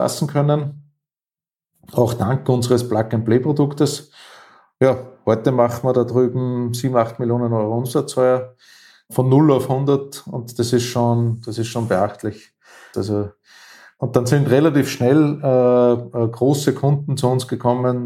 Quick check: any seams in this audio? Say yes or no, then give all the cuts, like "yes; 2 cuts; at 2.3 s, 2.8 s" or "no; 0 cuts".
yes; 1 cut; at 12.9 s